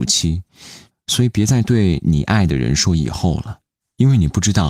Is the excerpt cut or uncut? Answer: cut